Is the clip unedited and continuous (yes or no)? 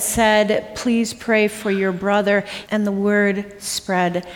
no